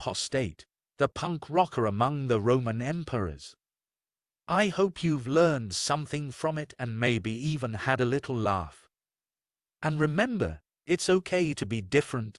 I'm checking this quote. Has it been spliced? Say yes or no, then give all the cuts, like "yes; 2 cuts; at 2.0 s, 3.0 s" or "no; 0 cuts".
no; 0 cuts